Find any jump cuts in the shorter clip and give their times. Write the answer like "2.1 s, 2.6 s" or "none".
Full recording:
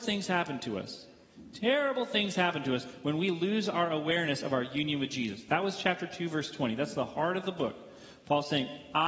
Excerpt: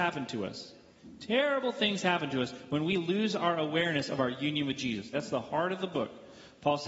5.1 s